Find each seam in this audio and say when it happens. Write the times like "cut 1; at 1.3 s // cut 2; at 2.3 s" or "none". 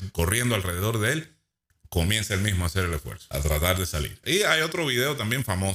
cut 1; at 4.2 s